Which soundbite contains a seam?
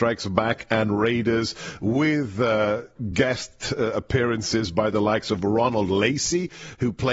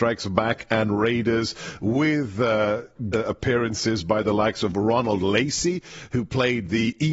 second; 1 cut; at 3.1 s

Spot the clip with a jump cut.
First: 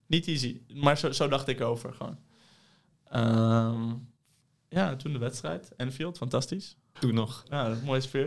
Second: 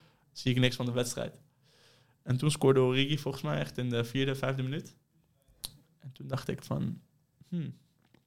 first; 1 cut; at 7.0 s

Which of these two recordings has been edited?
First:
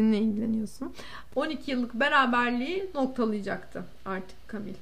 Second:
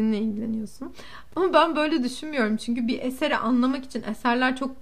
first; 1 cut; at 1.3 s

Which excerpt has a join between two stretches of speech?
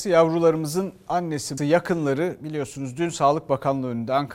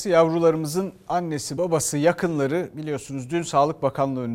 first; 1 cut; at 1.6 s

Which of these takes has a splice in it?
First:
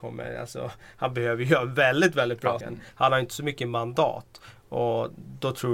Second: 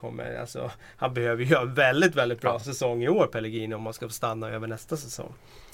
first; 2 cuts; at 2.6 s, 4.6 s

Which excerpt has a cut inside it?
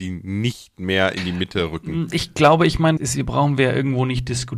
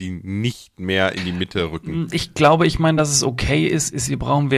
first; 1 cut; at 3.0 s

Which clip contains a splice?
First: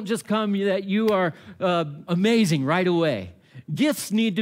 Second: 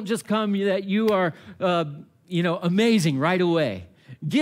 first; 1 cut; at 2.1 s

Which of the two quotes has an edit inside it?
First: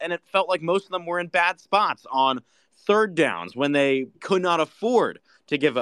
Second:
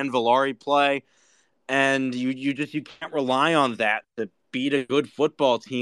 first; 1 cut; at 4.1 s

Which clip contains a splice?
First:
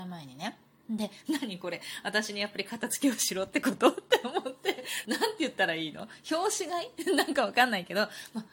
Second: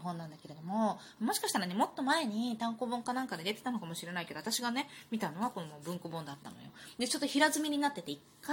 first; 1 cut; at 5.0 s

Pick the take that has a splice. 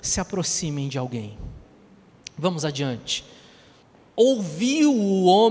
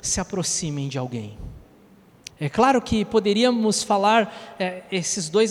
second; 1 cut; at 2.3 s

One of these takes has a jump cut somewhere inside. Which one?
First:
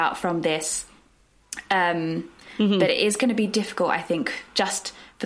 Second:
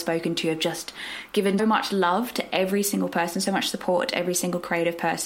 second; 1 cut; at 1.6 s

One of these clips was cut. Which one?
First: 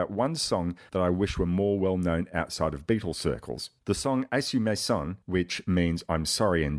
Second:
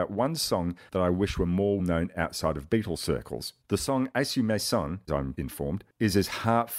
second; 2 cuts; at 1.8 s, 5.1 s

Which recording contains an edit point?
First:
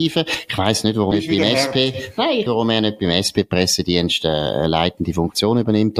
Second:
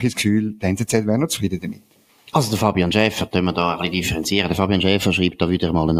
first; 2 cuts; at 1.1 s, 2.5 s

